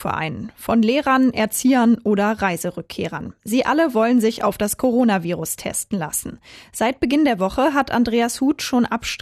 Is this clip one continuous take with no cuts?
yes; 0 cuts

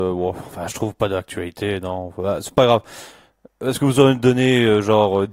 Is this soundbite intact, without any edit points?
yes; 0 cuts

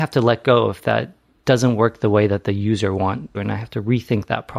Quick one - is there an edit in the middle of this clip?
yes; 1 cut; at 3.3 s

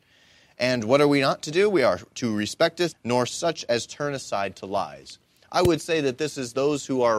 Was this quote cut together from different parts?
yes; 1 cut; at 2.9 s

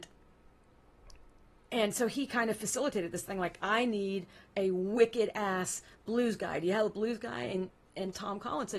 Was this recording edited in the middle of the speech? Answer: no; 0 cuts

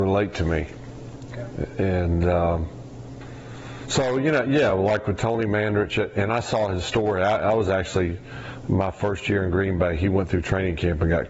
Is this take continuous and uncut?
yes; 0 cuts

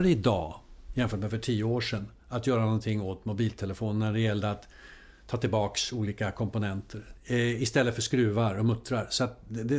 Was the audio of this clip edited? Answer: yes; 1 cut; at 7.1 s

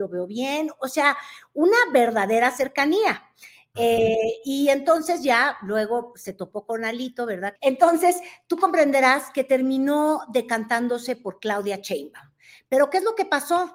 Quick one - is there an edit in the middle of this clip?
yes; 1 cut; at 7.6 s

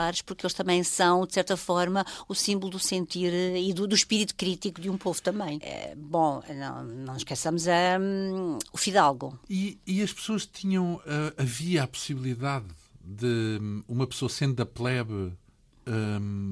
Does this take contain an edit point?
yes; 2 cuts; at 5.6 s, 9.4 s

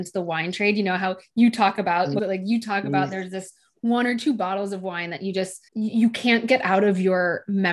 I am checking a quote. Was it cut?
yes; 2 cuts; at 2.2 s, 5.7 s

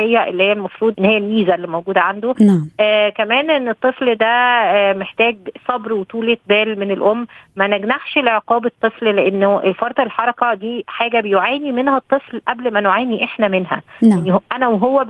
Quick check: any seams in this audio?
yes; 1 cut; at 0.9 s

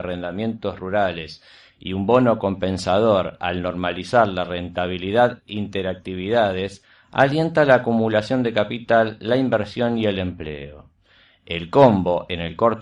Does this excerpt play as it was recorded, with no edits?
yes; 0 cuts

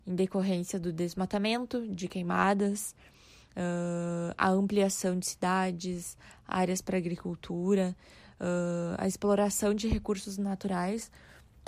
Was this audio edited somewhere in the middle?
no; 0 cuts

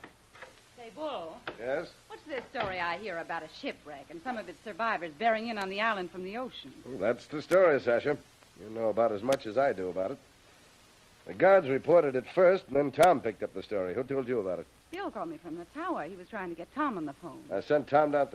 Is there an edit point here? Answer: no; 0 cuts

